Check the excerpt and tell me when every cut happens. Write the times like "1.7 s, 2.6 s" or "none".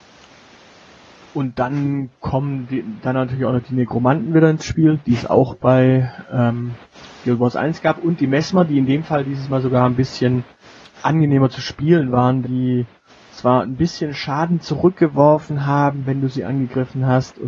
12.4 s